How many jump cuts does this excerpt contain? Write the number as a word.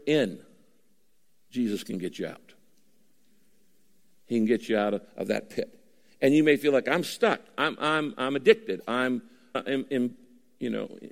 one